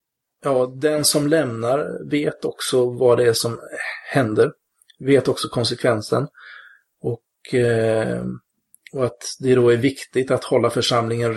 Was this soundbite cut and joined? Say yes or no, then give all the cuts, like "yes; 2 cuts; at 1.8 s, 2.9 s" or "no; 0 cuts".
no; 0 cuts